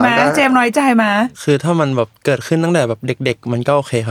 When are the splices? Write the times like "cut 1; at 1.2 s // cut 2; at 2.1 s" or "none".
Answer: cut 1; at 1.3 s